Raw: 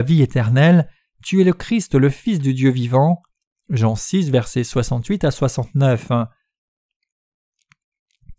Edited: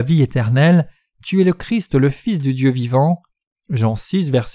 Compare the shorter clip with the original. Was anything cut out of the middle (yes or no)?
no